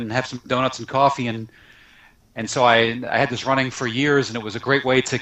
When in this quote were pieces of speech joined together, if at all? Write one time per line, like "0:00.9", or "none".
none